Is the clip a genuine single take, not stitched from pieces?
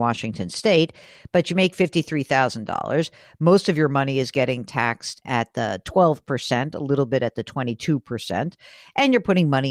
yes; 0 cuts

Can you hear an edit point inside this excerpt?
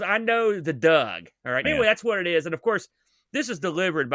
yes; 1 cut; at 1.6 s

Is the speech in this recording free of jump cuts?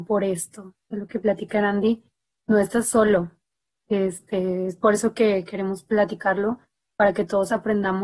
yes; 0 cuts

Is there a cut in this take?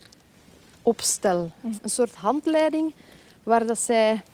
yes; 1 cut; at 1.8 s

